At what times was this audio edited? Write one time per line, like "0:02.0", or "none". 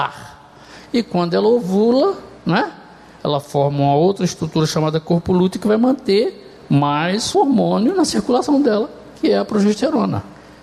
0:07.3